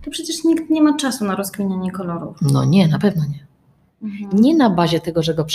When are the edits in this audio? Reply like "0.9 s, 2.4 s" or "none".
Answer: 3.9 s